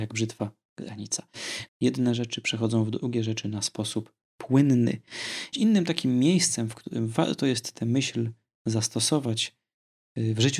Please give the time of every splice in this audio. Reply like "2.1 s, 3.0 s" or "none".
1.7 s, 5.5 s